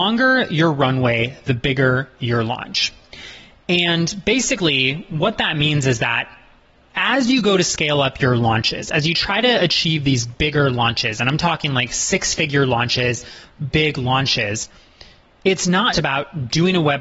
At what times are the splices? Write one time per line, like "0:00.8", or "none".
0:13.7
0:15.9